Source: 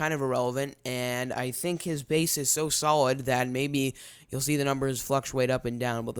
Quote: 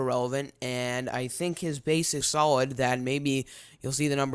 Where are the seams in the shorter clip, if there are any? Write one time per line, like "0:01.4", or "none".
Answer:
0:02.2